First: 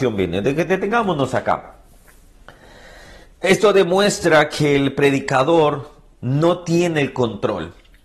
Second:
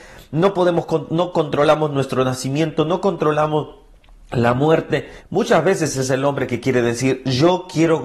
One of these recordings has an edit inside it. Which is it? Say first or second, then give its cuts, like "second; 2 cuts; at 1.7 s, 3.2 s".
second; 1 cut; at 5.2 s